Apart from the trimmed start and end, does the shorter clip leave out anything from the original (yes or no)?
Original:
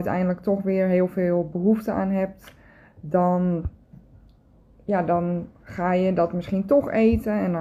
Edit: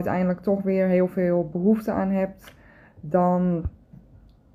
no